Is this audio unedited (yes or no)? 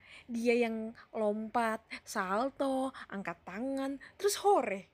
no